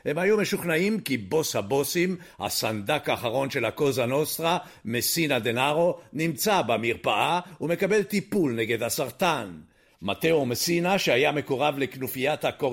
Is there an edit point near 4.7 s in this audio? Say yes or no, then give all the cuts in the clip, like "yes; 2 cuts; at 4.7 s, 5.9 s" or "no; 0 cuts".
no; 1 cut; at 9.9 s